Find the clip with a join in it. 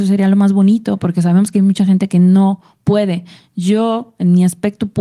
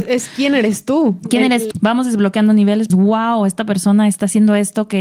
second; 2 cuts; at 1.7 s, 2.9 s

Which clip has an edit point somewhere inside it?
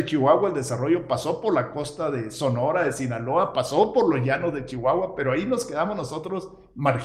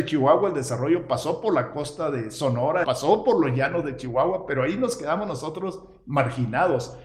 second; 1 cut; at 2.8 s

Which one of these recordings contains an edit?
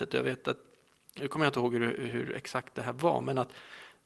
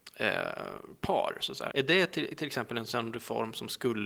second; 1 cut; at 1.7 s

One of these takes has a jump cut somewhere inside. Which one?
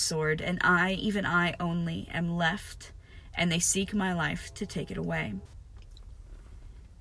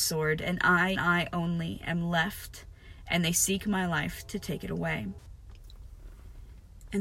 second; 1 cut; at 1.0 s

